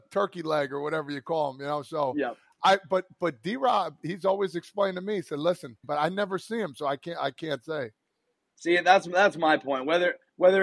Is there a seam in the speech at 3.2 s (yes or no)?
no